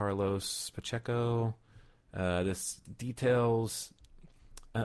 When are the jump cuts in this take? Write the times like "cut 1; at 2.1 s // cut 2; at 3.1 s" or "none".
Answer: none